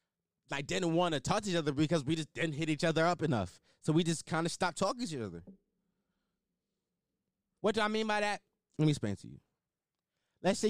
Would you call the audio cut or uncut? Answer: cut